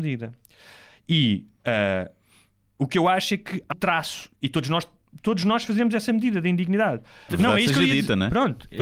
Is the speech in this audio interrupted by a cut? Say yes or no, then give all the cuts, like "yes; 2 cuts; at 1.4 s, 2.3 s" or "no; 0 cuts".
yes; 2 cuts; at 3.7 s, 7.3 s